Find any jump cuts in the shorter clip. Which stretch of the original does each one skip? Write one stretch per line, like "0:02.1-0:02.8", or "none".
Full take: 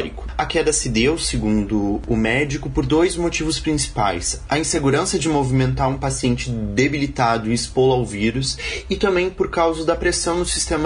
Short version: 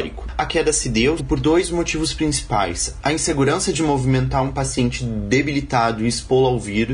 0:01.2-0:02.6

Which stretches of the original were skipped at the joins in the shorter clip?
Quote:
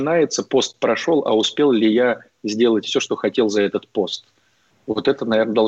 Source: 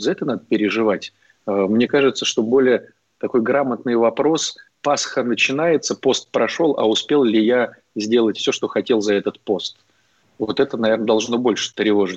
none

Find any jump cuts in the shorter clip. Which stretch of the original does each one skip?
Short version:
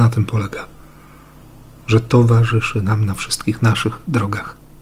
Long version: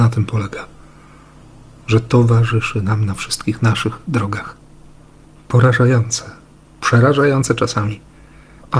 none

